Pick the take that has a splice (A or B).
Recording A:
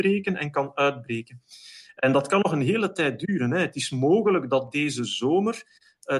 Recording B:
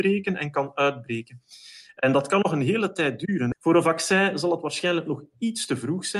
B